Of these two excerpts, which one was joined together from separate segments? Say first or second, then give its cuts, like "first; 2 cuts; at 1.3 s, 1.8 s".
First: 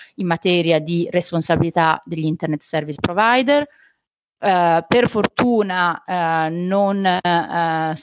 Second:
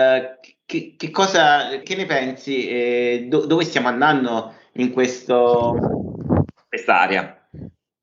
second; 1 cut; at 1.8 s